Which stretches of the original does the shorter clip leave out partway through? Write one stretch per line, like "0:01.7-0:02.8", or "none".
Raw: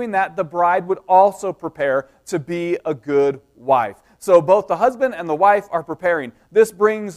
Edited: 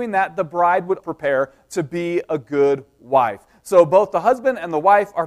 0:01.0-0:01.6